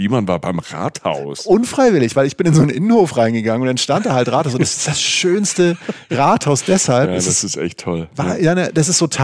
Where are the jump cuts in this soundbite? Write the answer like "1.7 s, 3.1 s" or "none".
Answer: none